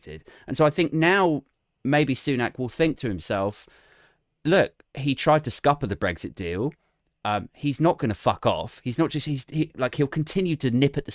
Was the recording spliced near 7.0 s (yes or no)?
no